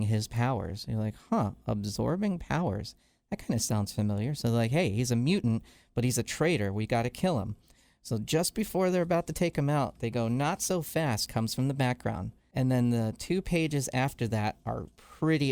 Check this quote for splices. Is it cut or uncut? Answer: uncut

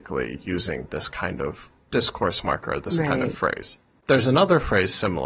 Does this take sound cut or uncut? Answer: uncut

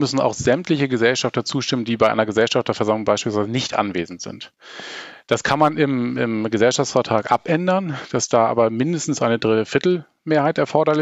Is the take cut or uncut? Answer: uncut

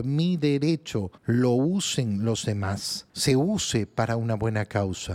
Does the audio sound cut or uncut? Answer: cut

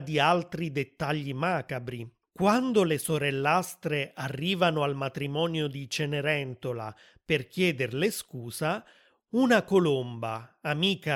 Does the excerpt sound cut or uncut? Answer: cut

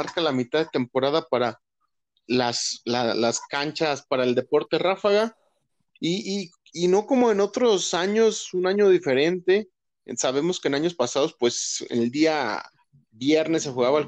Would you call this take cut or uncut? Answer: uncut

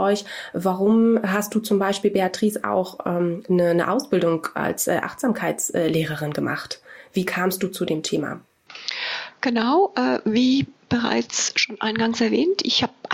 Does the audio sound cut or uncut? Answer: uncut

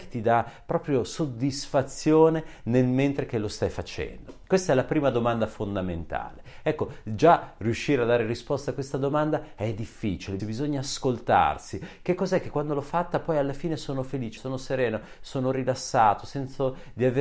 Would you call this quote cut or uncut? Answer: cut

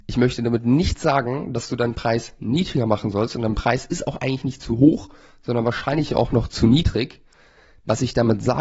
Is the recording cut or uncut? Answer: uncut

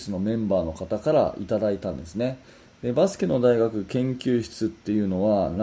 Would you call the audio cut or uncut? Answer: uncut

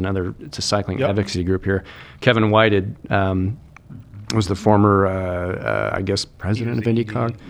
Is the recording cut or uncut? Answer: uncut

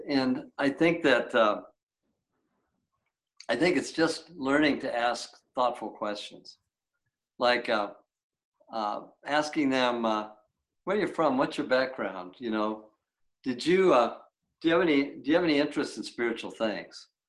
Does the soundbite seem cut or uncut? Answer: uncut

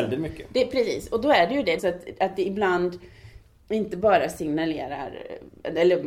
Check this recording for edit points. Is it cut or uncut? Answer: cut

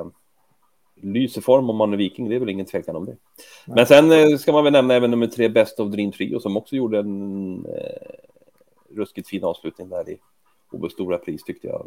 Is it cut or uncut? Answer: uncut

